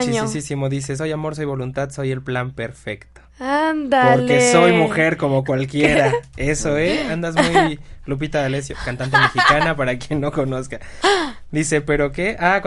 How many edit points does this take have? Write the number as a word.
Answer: zero